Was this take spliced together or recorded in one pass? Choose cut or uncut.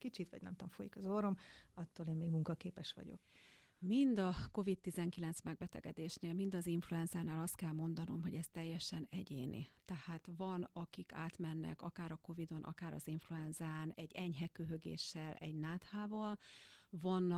cut